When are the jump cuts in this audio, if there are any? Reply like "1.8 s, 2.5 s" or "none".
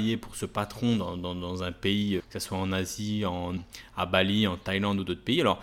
2.2 s, 3.6 s